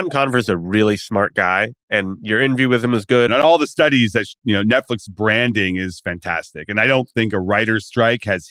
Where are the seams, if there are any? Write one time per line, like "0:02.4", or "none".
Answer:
0:03.3